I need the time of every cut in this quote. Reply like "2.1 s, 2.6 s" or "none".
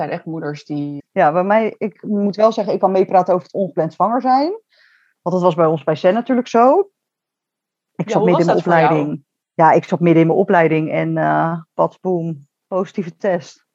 1.0 s